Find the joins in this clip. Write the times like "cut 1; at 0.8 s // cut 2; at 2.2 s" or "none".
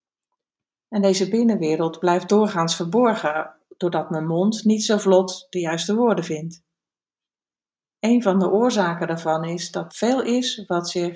cut 1; at 9.9 s